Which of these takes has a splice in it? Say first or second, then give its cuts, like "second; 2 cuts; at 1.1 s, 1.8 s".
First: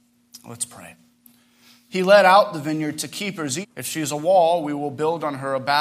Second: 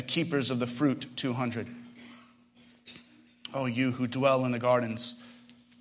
first; 2 cuts; at 1.9 s, 3.6 s